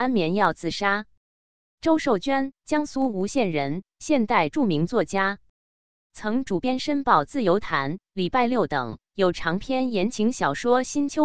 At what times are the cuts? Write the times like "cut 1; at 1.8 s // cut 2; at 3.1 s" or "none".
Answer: cut 1; at 2.6 s